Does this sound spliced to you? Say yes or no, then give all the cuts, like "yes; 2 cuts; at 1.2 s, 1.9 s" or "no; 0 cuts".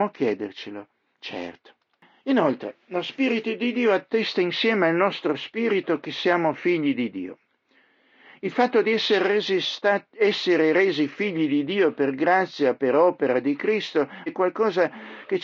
yes; 1 cut; at 14.3 s